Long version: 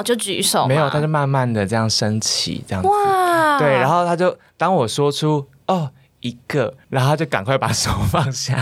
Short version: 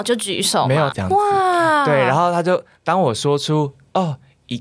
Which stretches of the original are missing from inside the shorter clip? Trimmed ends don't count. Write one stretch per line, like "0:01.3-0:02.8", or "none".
0:00.9-0:02.6

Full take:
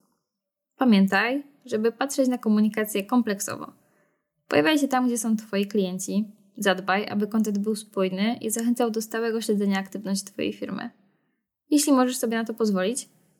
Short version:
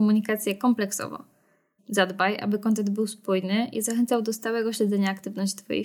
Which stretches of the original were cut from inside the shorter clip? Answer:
0:04.3-0:06.5

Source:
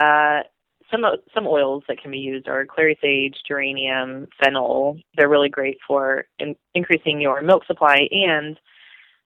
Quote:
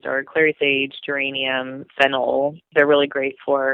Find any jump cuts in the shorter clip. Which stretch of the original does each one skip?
none

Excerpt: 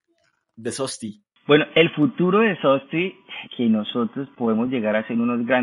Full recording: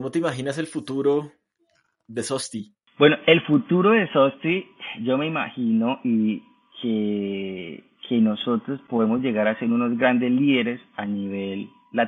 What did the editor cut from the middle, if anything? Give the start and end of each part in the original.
0:05.0-0:08.0

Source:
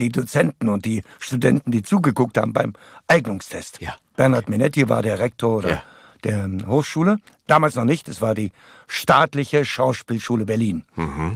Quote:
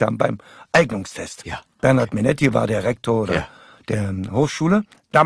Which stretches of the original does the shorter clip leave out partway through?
none

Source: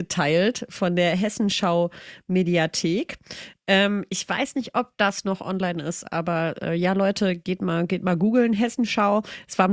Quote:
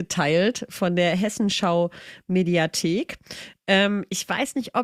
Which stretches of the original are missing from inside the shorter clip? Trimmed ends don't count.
none

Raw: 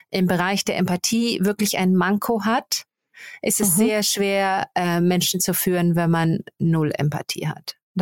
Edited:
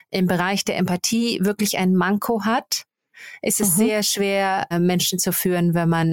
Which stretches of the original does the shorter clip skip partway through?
0:04.7-0:04.9

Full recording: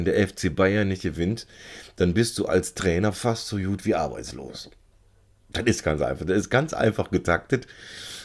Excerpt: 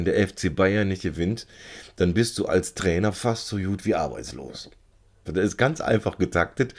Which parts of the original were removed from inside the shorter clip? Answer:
0:05.3-0:06.2

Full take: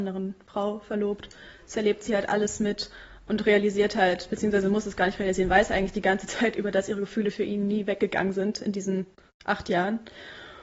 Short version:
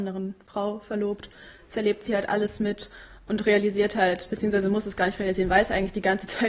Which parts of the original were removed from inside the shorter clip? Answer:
none

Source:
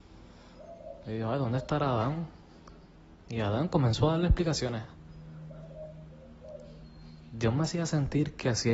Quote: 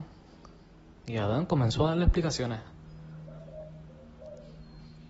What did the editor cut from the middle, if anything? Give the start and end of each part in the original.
none

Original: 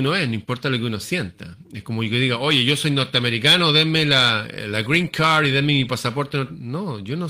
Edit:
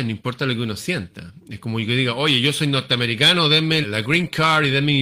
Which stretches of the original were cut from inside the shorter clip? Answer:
0:04.0-0:04.6

